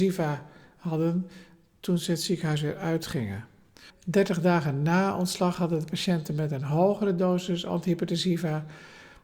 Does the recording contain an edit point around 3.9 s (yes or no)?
yes